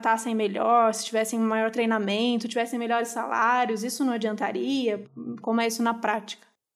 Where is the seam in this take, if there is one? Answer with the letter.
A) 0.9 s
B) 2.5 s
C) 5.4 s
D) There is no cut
C